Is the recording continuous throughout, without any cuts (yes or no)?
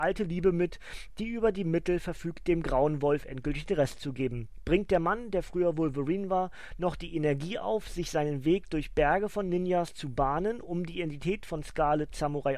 yes